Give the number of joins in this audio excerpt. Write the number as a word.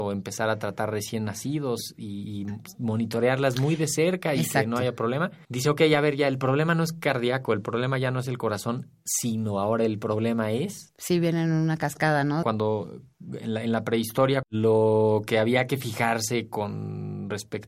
two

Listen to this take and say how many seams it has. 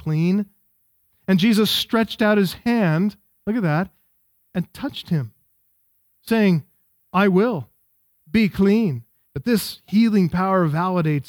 one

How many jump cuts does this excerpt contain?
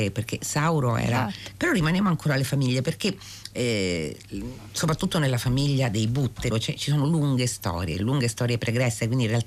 three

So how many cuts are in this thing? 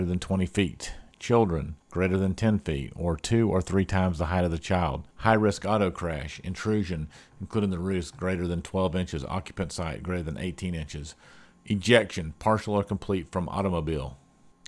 two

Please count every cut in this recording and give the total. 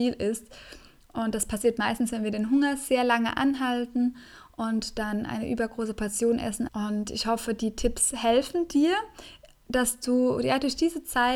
one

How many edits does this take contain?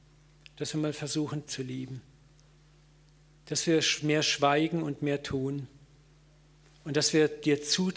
one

